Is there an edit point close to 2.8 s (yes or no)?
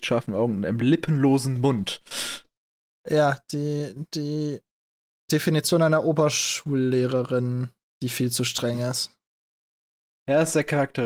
no